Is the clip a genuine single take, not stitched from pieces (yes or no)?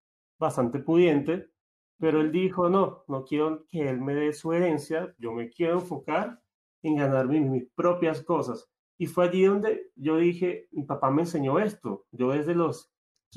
yes